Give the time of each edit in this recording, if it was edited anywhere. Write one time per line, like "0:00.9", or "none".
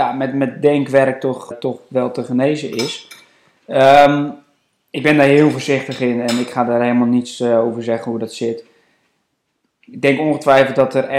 0:01.5